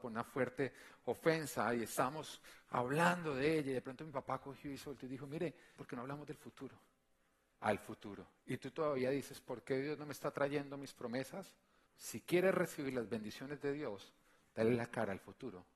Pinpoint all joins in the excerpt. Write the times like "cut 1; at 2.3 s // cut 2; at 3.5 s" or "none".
cut 1; at 5.8 s // cut 2; at 7.6 s // cut 3; at 11.9 s